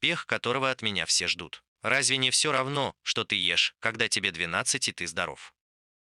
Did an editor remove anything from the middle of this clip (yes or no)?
yes